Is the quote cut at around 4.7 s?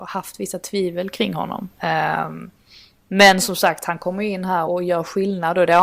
yes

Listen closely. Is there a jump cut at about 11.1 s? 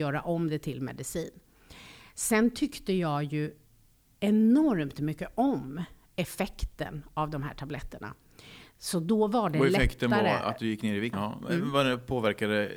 yes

